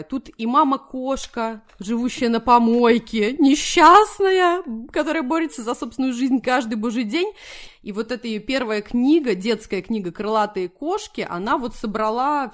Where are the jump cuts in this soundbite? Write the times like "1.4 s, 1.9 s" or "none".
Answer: 7.7 s